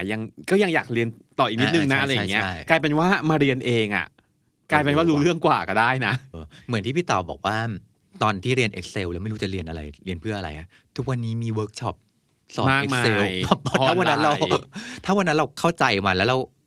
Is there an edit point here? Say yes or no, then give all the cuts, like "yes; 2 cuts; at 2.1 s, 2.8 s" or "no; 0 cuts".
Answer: yes; 1 cut; at 6.3 s